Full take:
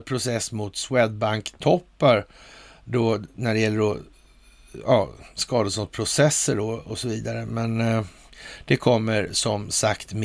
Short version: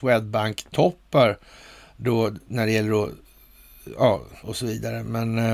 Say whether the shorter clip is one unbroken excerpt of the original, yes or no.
no